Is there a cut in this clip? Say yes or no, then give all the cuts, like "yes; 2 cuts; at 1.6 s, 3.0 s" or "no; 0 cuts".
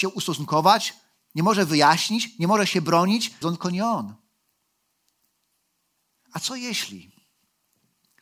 yes; 1 cut; at 3.4 s